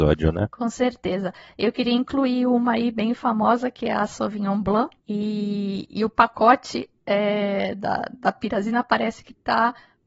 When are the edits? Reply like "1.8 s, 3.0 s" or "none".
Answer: 5.0 s